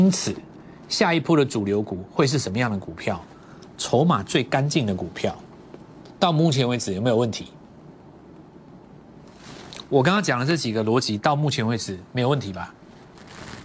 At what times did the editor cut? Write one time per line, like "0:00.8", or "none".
none

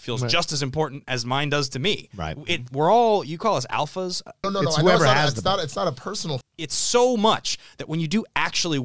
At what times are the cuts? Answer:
0:04.4
0:06.4

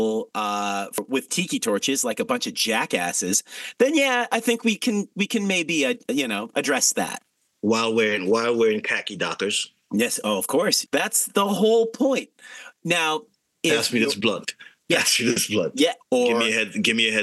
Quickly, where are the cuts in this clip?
0:10.9
0:16.0

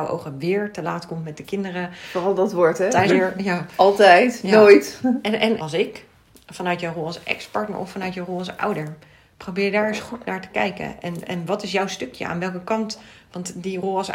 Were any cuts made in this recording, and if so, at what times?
0:03.1
0:05.6

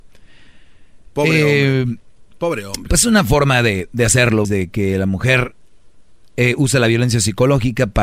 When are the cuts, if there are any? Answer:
0:04.4

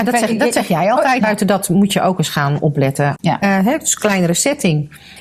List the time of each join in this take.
0:01.2
0:03.2

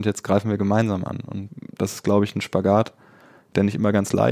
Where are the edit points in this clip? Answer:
none

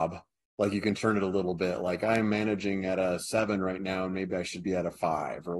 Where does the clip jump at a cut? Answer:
none

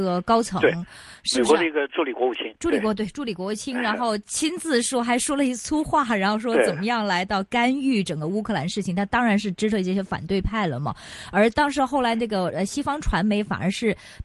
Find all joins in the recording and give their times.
0:01.9

